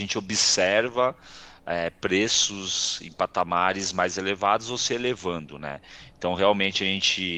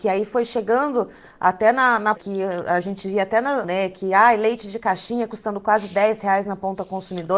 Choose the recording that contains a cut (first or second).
second